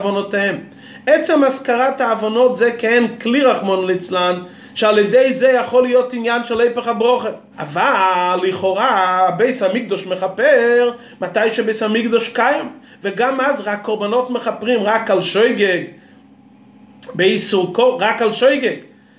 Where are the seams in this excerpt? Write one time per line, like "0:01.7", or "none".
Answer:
0:07.5